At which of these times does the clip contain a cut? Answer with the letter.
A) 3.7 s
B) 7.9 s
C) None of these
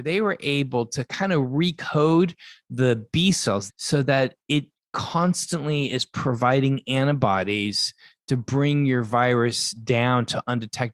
A